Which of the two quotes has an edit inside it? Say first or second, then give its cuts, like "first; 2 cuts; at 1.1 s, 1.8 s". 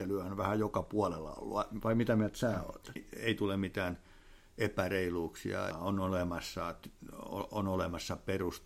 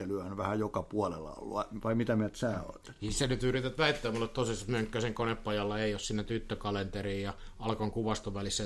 first; 2 cuts; at 3.0 s, 5.7 s